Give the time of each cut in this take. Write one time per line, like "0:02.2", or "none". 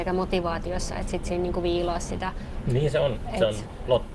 0:02.7